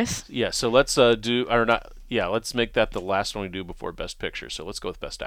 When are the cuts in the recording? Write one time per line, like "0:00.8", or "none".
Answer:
none